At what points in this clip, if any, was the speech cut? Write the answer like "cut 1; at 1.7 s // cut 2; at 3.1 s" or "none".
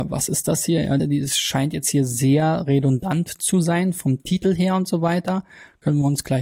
cut 1; at 1.0 s